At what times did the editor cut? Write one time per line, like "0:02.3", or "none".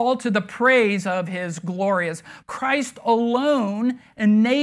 0:02.4